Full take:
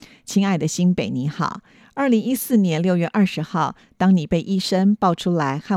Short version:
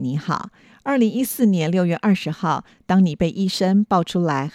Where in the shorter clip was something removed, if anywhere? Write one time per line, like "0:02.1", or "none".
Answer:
none